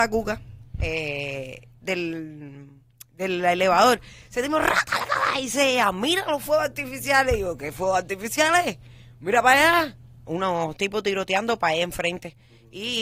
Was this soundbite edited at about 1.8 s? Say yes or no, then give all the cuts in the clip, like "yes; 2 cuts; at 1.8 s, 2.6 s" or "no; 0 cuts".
yes; 1 cut; at 1.8 s